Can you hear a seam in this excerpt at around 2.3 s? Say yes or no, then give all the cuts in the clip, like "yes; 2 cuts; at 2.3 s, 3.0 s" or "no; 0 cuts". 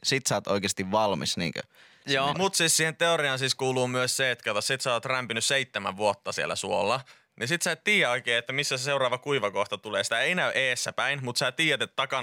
yes; 1 cut; at 2.3 s